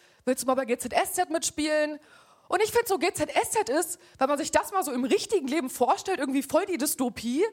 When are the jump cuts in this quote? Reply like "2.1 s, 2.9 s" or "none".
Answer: none